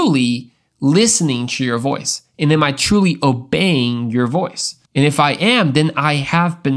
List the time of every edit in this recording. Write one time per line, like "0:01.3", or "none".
0:04.8